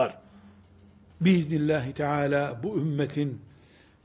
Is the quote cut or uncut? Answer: cut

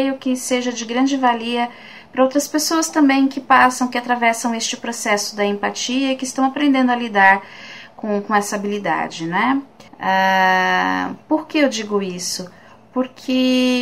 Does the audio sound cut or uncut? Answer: cut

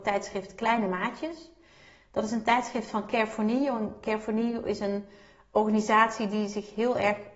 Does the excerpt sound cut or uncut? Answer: uncut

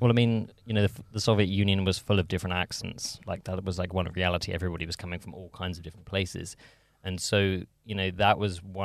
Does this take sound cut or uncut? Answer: uncut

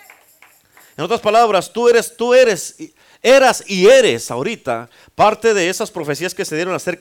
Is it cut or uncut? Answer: uncut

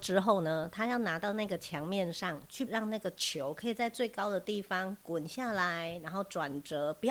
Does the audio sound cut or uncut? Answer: cut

